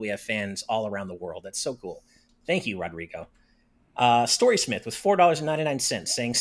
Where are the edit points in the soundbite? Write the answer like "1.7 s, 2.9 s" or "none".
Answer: none